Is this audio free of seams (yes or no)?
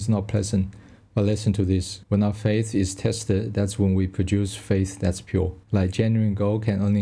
no